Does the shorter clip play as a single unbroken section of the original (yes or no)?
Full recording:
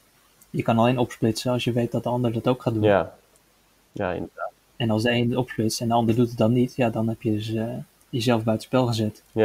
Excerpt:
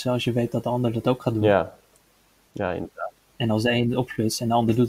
yes